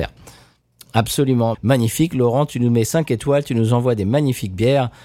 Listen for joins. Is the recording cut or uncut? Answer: cut